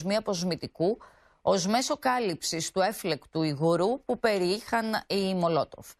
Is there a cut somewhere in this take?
no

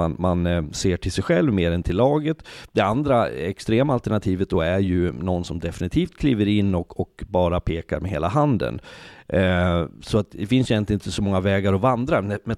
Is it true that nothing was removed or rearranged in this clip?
yes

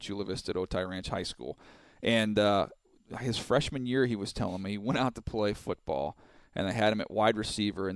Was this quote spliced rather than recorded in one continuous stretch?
no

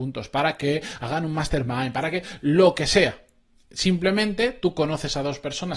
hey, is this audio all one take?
yes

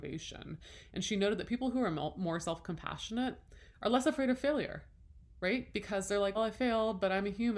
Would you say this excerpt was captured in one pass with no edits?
no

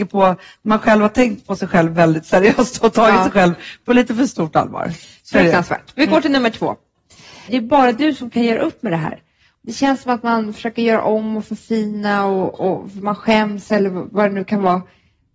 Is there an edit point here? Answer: yes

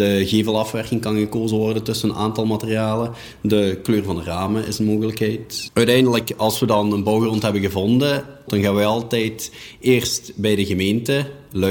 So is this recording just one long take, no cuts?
no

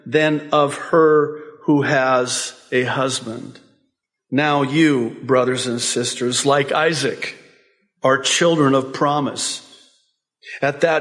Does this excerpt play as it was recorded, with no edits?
yes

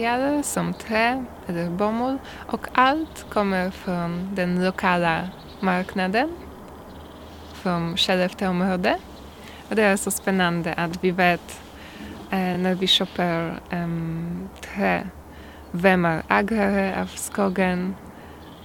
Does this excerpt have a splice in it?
no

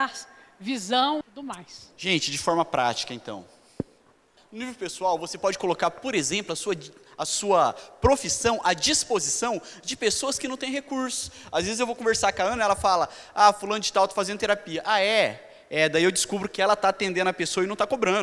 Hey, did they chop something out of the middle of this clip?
yes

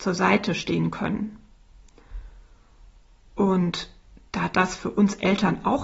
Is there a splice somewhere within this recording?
no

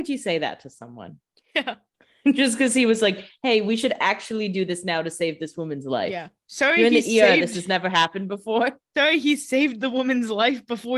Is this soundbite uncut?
yes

